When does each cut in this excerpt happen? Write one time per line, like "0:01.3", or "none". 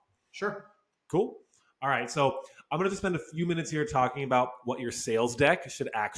none